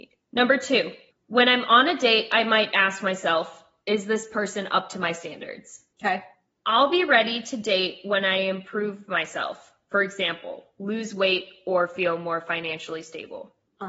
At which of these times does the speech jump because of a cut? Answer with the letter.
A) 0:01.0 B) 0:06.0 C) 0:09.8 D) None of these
D